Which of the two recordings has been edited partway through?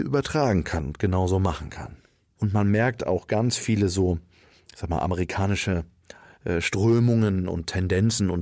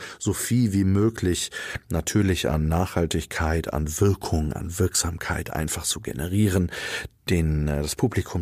first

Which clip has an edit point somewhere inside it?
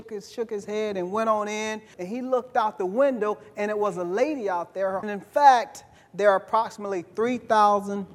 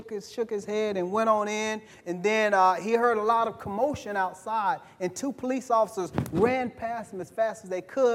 first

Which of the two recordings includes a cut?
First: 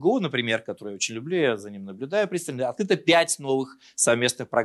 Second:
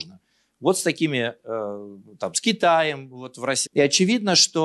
second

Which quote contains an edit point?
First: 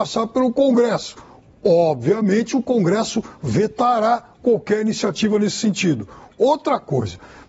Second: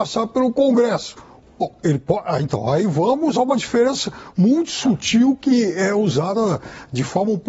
second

